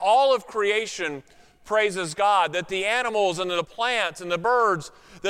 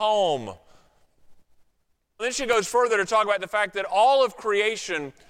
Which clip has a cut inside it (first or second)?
second